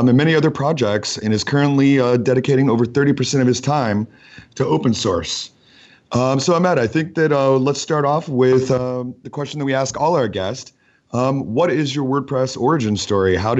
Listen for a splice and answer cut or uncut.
uncut